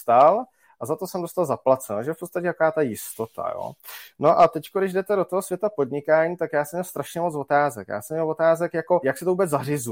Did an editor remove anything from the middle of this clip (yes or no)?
yes